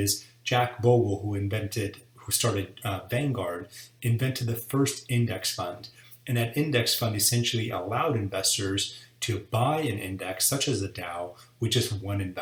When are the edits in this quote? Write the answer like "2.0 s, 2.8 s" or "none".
none